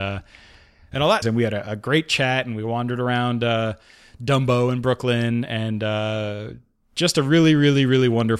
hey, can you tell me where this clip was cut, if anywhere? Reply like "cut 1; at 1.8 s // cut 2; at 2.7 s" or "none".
cut 1; at 1.2 s